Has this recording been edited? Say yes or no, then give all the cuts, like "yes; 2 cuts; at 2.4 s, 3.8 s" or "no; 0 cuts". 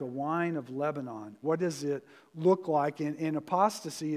yes; 1 cut; at 1.4 s